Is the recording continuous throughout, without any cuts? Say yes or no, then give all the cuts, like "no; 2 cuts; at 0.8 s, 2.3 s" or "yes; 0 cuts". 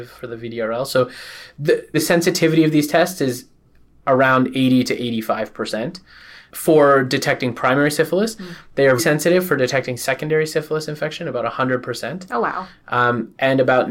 no; 2 cuts; at 1.9 s, 9.0 s